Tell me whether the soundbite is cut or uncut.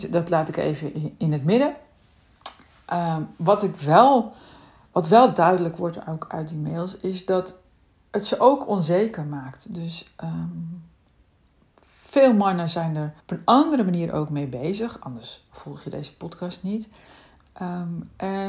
cut